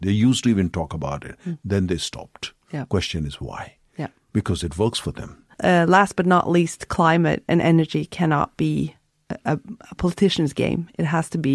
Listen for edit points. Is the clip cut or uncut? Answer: cut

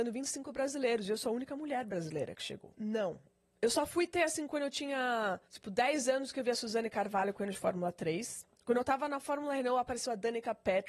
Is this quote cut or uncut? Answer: cut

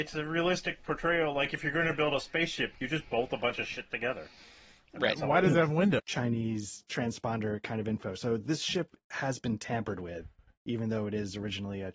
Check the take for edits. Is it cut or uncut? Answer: cut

